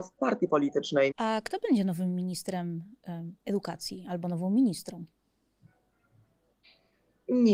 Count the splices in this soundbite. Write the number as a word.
two